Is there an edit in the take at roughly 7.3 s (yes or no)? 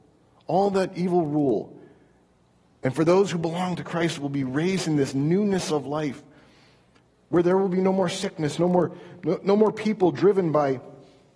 no